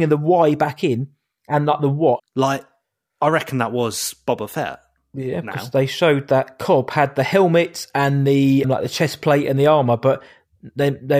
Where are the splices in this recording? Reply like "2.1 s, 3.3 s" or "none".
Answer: 2.2 s, 8.6 s

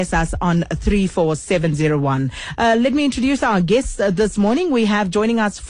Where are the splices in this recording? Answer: none

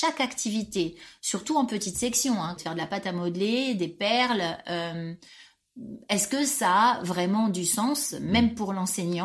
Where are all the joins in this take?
2.6 s

